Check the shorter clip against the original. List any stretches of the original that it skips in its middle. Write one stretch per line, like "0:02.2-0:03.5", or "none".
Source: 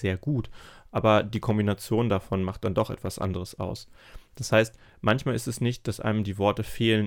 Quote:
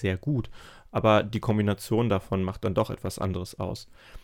none